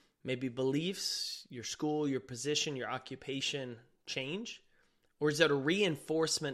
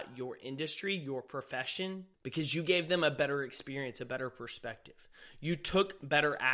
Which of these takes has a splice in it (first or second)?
second